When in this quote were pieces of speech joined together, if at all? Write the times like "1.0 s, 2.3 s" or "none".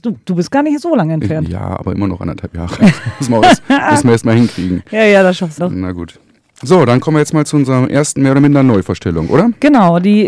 5.6 s